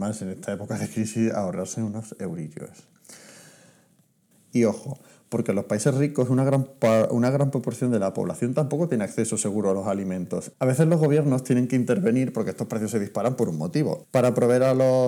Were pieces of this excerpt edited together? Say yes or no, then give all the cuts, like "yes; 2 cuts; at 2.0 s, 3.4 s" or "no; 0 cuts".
yes; 3 cuts; at 4.3 s, 10.5 s, 14.0 s